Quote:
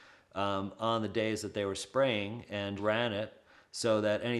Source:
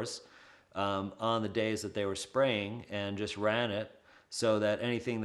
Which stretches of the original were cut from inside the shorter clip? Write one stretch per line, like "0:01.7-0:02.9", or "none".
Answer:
0:03.2-0:03.3